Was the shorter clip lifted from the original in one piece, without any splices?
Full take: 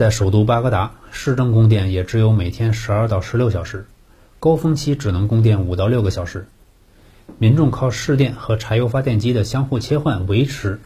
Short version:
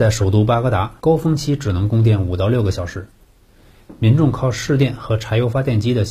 no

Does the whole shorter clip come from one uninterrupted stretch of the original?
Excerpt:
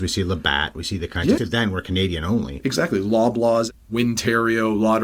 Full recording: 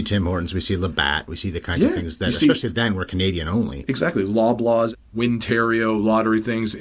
no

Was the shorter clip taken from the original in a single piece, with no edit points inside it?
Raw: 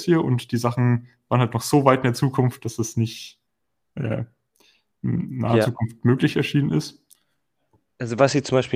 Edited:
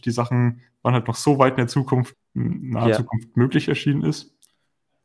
no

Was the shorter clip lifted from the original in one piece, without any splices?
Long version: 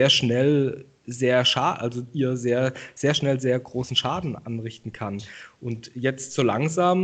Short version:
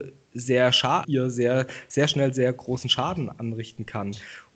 no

